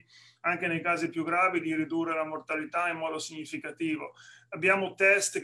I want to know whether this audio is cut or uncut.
uncut